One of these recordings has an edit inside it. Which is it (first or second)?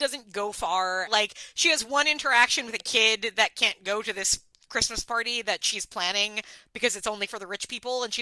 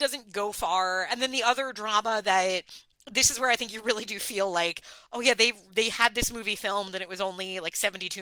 first